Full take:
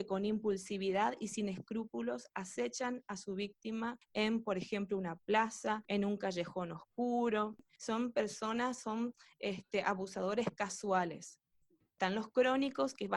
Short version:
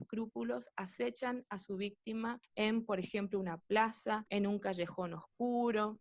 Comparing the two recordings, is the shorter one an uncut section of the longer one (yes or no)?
yes